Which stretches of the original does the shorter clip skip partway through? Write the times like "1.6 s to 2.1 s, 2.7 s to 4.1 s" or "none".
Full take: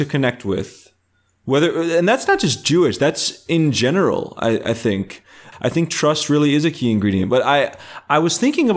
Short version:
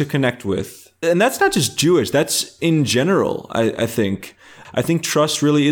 1.0 s to 1.9 s